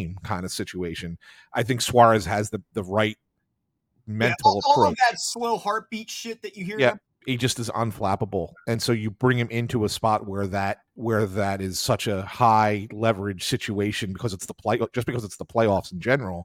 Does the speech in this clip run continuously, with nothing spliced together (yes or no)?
no